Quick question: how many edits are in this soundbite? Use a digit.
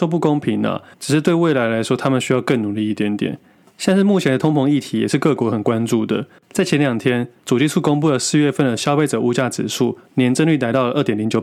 0